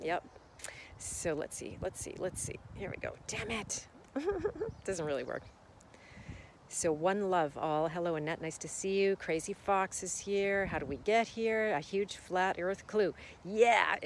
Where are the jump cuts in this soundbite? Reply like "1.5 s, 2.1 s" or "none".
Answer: none